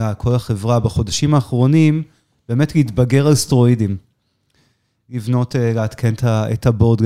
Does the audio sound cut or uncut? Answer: uncut